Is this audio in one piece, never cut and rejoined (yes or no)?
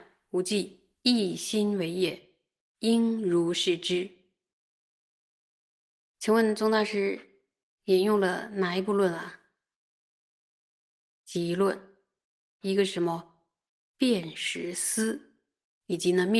no